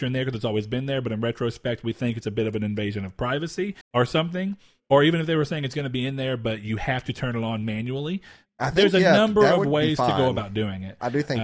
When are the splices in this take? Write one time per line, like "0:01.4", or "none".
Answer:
0:03.8